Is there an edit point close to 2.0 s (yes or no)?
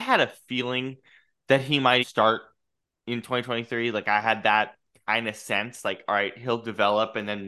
yes